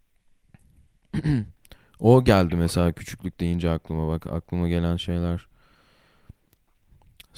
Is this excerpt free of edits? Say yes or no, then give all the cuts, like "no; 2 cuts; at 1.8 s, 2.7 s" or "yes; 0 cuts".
yes; 0 cuts